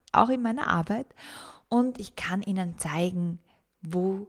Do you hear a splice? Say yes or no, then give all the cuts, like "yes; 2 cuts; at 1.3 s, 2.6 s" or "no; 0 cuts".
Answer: no; 0 cuts